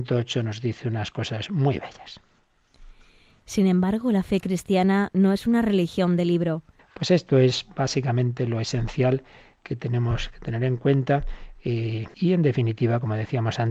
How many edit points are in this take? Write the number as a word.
two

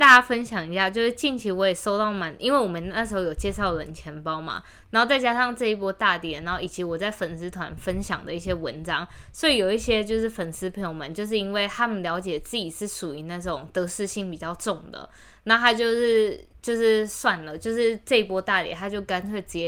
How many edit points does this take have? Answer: zero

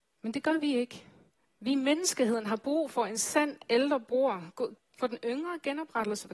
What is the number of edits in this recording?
two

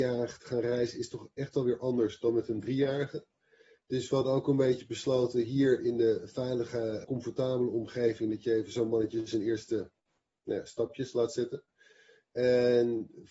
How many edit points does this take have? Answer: one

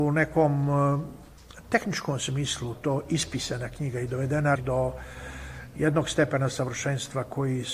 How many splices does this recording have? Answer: one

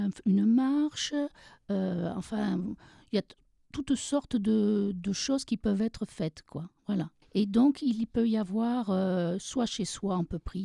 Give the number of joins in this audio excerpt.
one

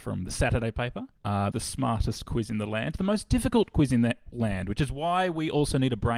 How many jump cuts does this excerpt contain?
one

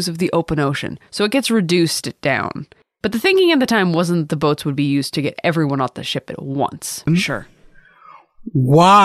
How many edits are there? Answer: one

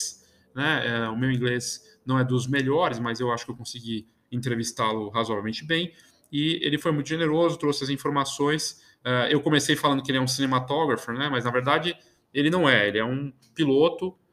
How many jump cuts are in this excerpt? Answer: zero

